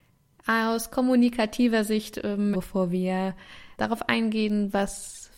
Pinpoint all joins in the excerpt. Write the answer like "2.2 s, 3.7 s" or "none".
2.5 s, 3.8 s

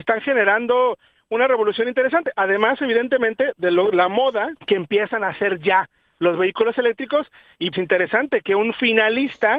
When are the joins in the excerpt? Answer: 4.6 s, 7.7 s

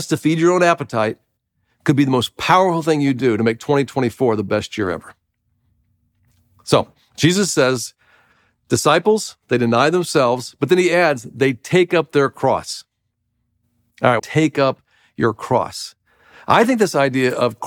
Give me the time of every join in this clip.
14.2 s

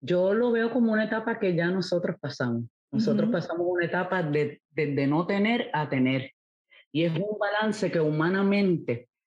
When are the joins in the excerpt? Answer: 4.6 s

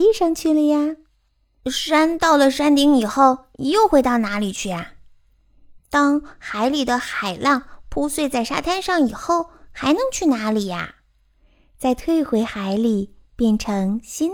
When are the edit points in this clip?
5.8 s

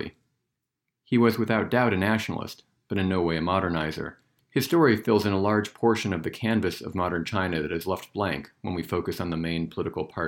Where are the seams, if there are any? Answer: 4.4 s

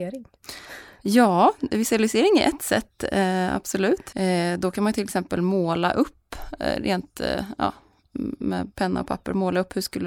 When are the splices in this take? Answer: 4.1 s

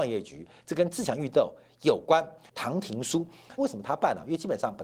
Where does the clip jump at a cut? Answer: 2.5 s, 3.6 s

